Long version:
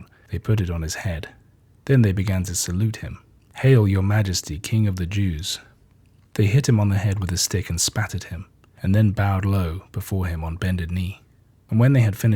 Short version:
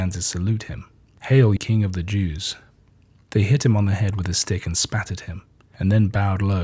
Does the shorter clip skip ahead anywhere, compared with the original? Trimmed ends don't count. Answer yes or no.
yes